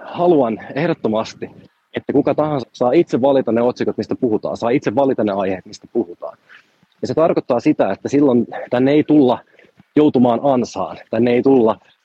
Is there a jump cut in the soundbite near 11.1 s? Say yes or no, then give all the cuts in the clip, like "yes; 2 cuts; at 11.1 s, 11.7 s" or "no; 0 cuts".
no; 1 cut; at 2.6 s